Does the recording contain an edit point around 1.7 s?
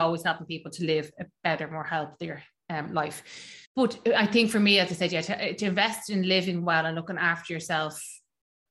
no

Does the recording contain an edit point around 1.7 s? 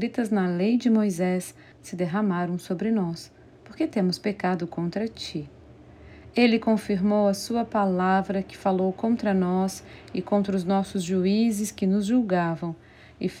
yes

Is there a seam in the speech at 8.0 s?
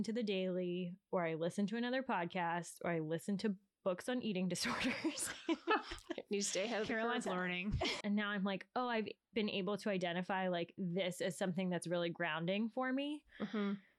yes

